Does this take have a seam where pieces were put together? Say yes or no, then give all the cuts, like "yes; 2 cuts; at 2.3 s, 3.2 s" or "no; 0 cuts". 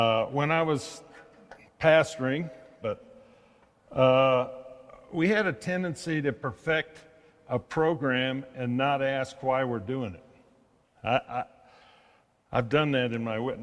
yes; 2 cuts; at 2.8 s, 10.8 s